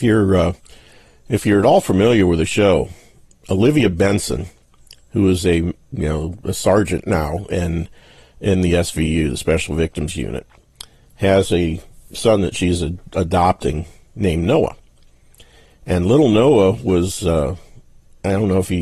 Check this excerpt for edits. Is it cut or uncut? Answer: uncut